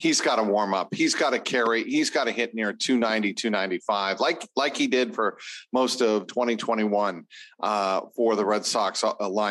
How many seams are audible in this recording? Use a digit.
0